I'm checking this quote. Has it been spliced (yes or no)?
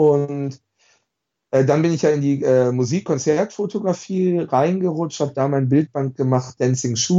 no